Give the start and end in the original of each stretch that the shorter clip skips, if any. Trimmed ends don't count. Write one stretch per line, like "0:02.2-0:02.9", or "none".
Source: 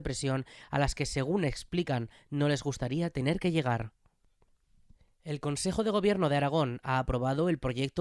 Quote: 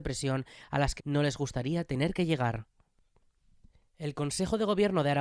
0:01.0-0:02.2

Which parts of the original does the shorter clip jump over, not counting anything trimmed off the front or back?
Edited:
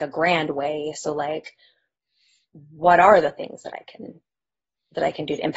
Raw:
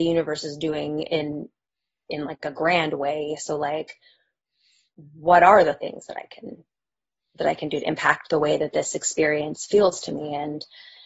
none

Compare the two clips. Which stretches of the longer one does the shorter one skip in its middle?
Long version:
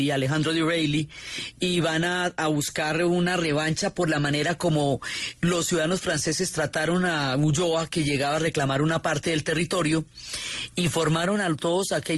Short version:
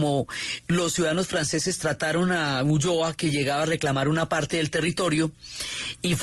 none

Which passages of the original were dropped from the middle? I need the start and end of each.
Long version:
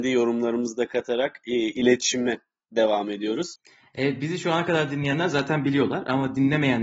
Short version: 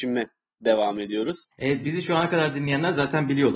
0:03.6-0:03.9

